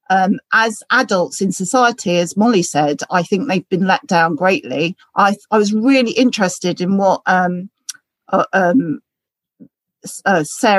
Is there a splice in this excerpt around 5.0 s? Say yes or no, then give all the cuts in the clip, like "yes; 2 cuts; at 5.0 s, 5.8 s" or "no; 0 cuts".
yes; 1 cut; at 5.0 s